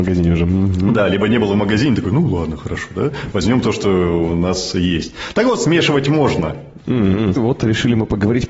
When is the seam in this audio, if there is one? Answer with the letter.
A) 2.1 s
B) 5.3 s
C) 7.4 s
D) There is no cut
C